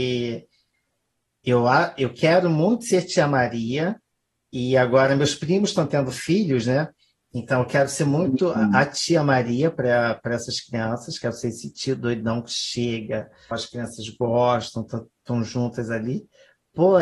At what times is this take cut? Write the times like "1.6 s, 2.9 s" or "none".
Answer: 13.5 s